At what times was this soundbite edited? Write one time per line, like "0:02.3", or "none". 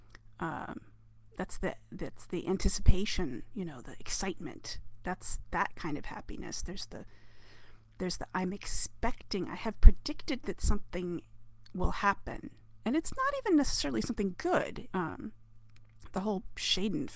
0:14.9

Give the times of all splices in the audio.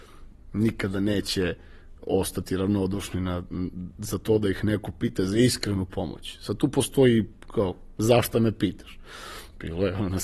0:02.0

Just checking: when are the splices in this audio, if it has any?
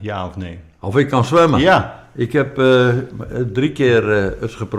none

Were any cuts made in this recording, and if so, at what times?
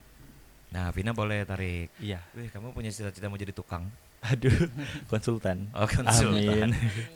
0:01.9

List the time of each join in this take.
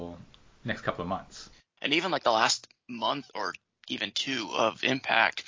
0:01.8
0:03.3

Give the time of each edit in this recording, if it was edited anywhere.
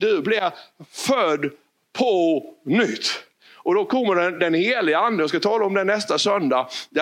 none

